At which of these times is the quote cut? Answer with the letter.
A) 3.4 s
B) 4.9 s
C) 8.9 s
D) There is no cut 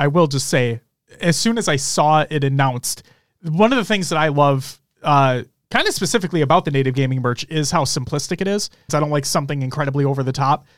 C